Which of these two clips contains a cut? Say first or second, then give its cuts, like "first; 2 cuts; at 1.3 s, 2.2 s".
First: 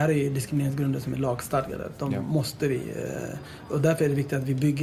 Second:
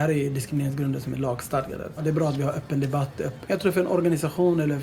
second; 2 cuts; at 2.0 s, 3.4 s